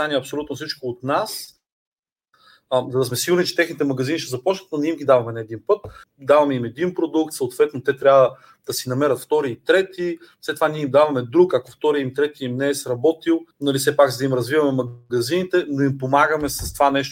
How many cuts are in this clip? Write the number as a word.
two